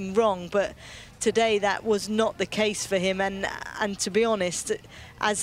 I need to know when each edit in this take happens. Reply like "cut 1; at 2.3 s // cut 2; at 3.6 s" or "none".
none